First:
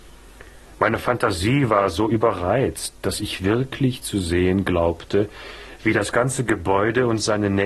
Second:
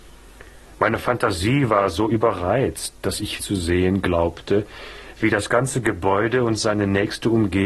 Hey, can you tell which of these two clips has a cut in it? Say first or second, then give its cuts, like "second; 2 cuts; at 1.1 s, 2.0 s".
second; 1 cut; at 3.4 s